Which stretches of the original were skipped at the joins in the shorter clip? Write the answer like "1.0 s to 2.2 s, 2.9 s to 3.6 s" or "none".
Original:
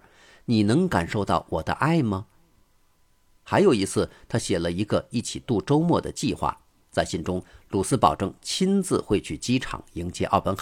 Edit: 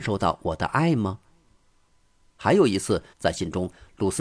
4.2 s to 6.8 s